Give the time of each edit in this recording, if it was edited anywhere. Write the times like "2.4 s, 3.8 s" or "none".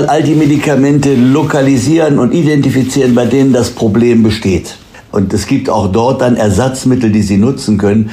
5.1 s